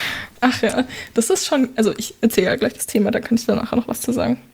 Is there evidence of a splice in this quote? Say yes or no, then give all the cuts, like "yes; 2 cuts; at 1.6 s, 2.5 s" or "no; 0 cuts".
no; 0 cuts